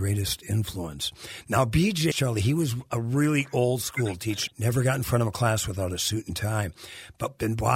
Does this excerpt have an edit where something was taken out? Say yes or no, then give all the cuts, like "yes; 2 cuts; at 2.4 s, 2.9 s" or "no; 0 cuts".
yes; 2 cuts; at 2.1 s, 4.5 s